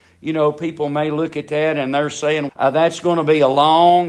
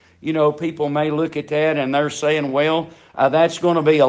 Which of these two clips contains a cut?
first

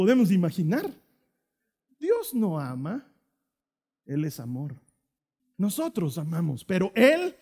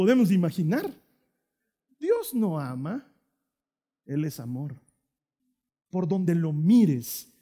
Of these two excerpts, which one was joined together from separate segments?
first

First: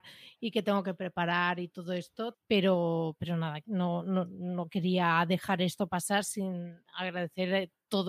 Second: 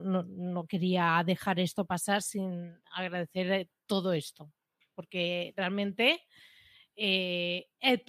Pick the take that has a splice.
first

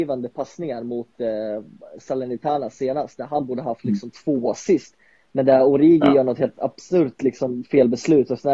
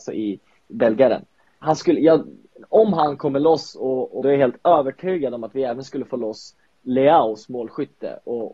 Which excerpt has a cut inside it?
second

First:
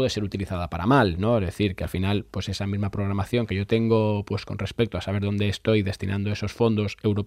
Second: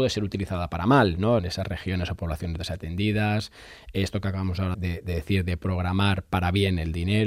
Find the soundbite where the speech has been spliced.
second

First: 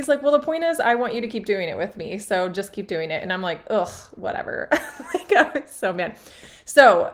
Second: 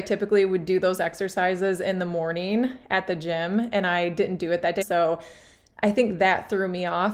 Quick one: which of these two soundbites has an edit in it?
second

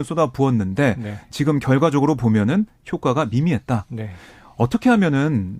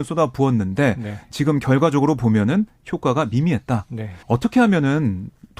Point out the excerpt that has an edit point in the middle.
second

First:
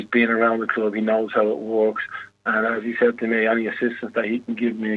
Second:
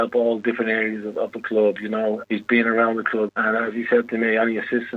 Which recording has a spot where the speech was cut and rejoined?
second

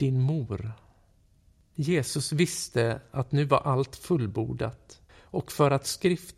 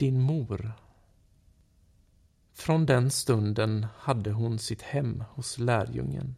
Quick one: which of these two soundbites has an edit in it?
first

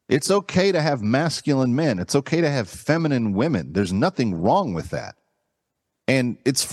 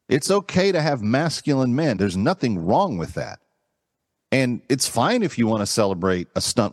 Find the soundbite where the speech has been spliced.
second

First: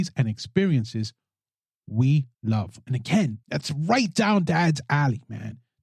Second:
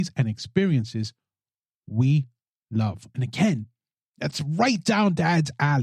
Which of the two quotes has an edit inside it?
first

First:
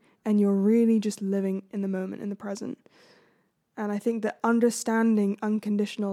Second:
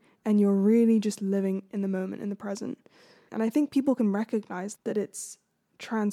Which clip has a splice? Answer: second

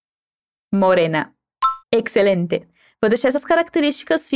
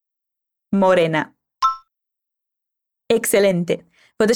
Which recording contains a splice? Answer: first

